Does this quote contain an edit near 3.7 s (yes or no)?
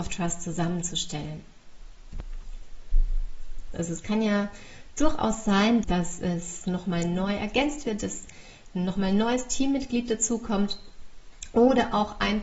yes